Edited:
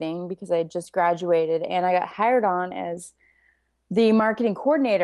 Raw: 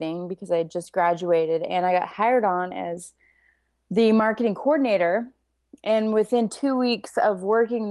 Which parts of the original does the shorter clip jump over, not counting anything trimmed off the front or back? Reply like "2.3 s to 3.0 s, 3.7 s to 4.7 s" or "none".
none